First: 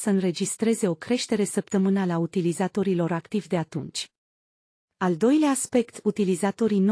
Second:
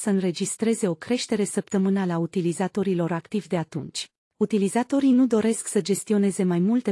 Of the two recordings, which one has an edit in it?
second; 1 cut; at 4.3 s

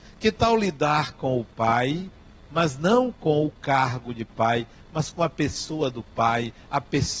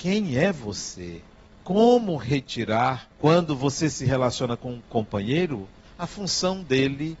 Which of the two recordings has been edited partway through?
second; 2 cuts; at 1.5 s, 3.1 s

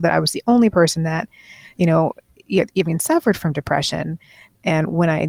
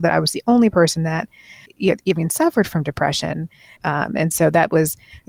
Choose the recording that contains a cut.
second; 2 cuts; at 1.7 s, 3.8 s

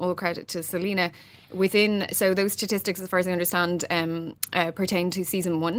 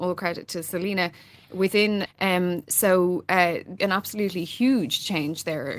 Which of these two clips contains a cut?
second; 2 cuts; at 2.1 s, 3.8 s

